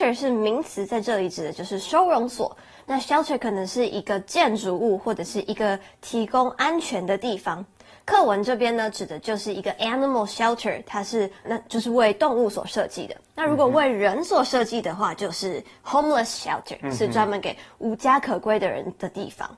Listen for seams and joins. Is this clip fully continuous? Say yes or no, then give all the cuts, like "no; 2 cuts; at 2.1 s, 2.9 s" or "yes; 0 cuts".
no; 1 cut; at 11.4 s